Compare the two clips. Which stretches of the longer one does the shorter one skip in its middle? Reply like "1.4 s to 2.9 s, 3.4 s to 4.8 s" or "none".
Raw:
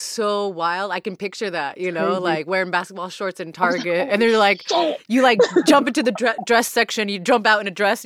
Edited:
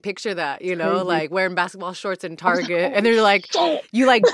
none